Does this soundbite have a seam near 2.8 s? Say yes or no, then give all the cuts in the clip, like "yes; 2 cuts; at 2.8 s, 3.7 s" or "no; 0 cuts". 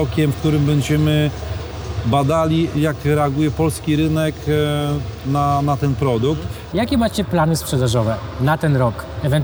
yes; 2 cuts; at 2.8 s, 6.7 s